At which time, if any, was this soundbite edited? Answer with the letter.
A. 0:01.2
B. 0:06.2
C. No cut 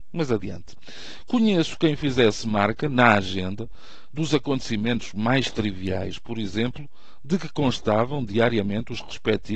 C